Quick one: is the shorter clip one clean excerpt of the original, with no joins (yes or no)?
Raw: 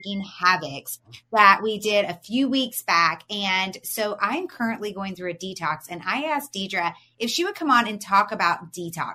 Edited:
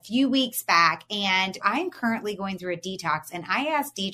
no